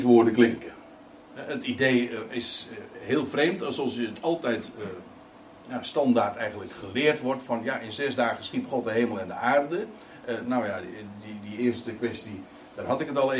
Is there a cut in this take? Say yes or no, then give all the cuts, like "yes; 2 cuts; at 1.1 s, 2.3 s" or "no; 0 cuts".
no; 0 cuts